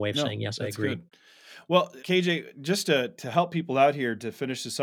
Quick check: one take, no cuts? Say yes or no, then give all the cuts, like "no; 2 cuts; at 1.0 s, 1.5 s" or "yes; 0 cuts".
no; 1 cut; at 2.0 s